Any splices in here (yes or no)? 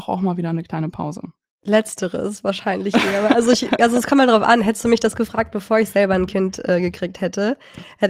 no